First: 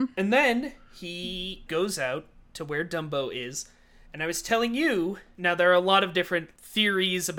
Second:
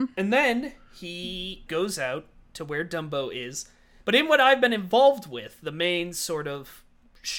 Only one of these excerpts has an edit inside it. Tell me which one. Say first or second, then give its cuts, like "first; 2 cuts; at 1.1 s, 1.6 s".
second; 1 cut; at 4.0 s